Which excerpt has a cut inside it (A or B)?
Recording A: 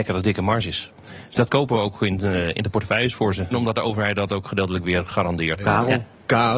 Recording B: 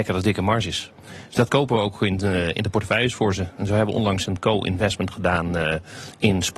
A